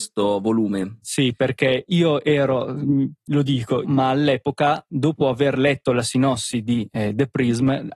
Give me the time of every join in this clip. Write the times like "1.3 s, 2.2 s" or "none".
3.8 s